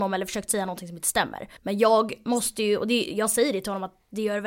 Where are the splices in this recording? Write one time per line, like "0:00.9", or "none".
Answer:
0:01.6